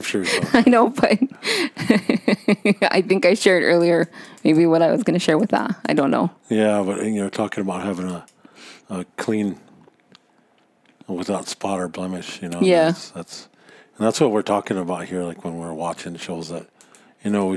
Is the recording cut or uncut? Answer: uncut